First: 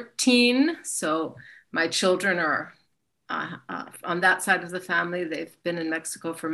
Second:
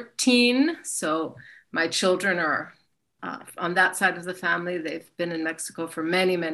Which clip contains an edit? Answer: second; 1 cut; at 3.2 s

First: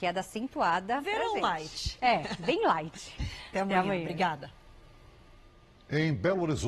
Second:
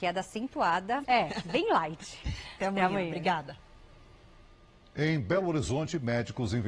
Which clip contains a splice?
second; 1 cut; at 1.0 s

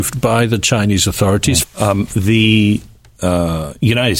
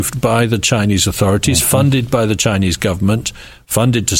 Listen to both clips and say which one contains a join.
first; 1 cut; at 1.6 s

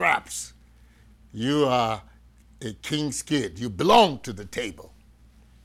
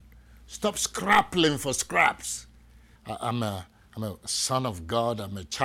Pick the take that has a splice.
second; 1 cut; at 3.0 s

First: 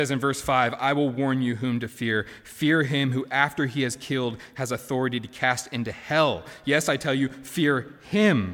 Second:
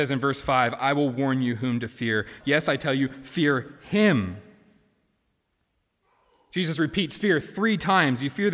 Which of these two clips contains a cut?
second; 1 cut; at 2.4 s

